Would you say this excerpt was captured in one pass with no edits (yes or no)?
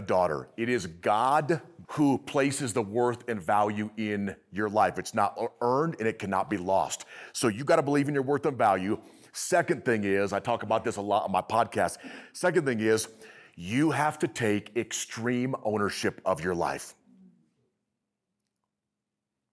no